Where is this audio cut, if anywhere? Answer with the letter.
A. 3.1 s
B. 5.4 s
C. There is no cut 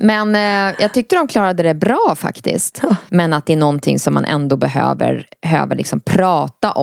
A